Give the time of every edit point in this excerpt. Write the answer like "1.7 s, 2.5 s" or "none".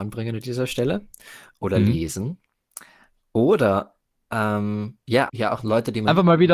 5.3 s